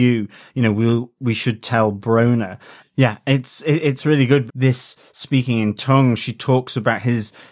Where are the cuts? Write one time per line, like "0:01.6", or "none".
0:02.8
0:04.5